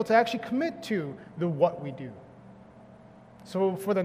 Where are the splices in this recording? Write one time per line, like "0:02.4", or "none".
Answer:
none